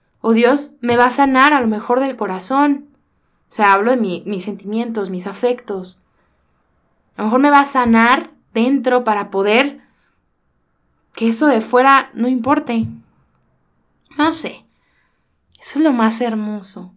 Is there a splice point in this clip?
yes; 1 cut; at 15.5 s

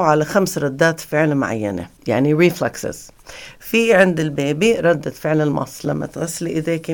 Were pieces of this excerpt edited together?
yes; 1 cut; at 2.0 s

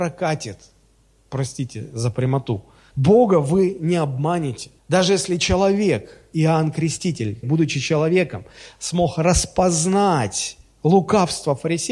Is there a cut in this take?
yes; 3 cuts; at 2.9 s, 4.8 s, 7.4 s

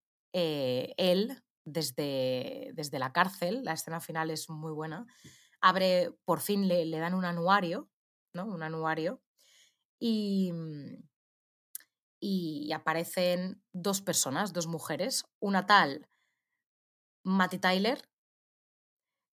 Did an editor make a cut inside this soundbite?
no; 0 cuts

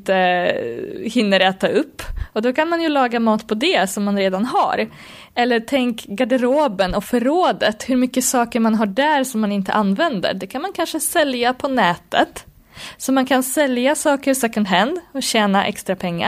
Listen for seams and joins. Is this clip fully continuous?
yes; 0 cuts

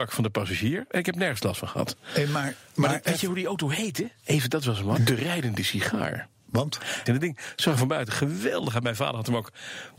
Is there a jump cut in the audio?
yes; 2 cuts; at 5.0 s, 7.1 s

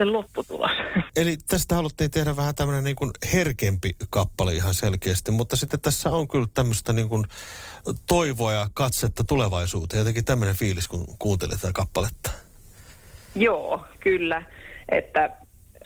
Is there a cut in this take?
yes; 1 cut; at 1.1 s

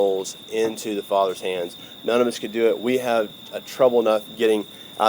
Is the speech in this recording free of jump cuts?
yes; 0 cuts

